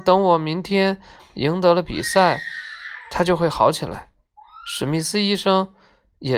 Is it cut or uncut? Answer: uncut